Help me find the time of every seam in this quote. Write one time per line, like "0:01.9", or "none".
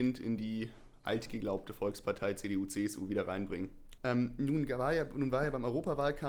0:04.0